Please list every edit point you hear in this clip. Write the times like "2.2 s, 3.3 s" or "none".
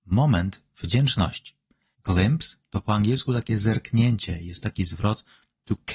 1.9 s